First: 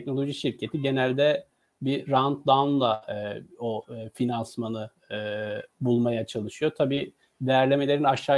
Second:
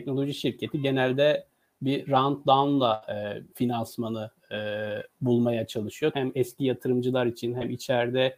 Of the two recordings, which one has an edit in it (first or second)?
second